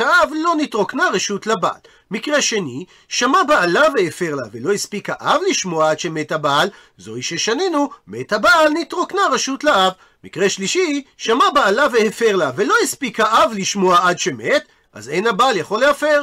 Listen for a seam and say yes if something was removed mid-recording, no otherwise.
no